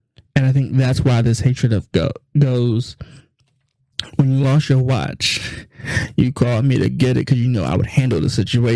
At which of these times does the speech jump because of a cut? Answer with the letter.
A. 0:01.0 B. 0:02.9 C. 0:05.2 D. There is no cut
D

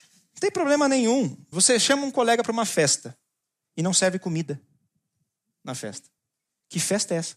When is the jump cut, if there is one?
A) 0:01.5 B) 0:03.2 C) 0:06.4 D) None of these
A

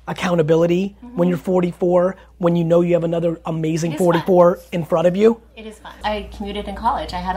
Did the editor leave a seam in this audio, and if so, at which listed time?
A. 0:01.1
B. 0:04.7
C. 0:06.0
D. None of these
C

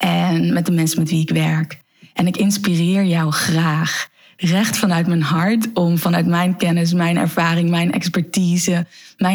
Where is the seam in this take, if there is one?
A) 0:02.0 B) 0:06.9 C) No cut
C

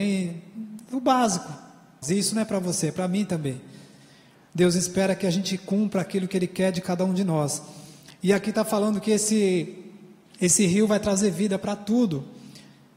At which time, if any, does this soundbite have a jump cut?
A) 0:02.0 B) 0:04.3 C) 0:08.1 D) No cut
A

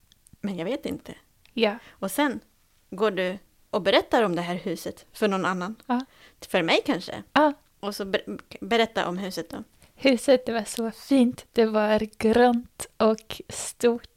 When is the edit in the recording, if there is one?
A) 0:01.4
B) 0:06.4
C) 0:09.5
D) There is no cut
D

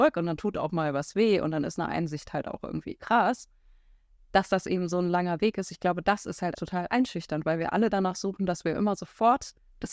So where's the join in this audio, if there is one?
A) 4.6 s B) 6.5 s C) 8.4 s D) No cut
B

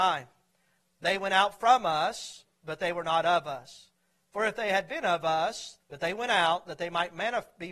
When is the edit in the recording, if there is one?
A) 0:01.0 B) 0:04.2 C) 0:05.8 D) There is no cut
C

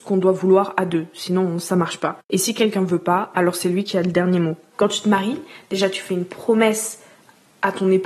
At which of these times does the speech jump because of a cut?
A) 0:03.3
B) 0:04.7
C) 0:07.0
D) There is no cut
B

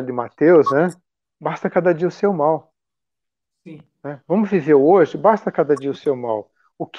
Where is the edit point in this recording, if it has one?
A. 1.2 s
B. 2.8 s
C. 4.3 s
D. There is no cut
D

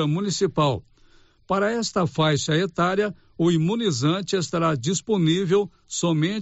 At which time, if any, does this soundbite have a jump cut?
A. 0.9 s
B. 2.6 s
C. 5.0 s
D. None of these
D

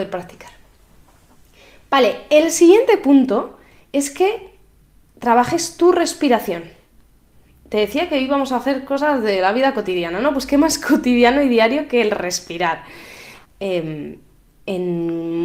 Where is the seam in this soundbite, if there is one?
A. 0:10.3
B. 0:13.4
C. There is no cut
B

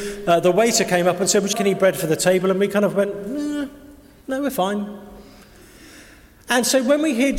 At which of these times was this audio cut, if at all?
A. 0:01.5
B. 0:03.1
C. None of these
A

